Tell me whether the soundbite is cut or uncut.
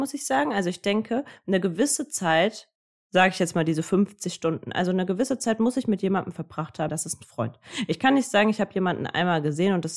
cut